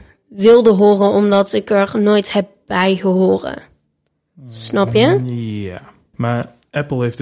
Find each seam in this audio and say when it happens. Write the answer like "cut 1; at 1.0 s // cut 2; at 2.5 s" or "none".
cut 1; at 6.1 s